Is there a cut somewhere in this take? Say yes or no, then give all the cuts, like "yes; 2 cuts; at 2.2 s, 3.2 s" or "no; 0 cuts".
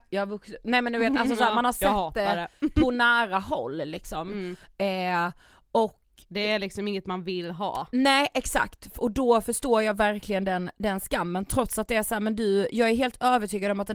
no; 0 cuts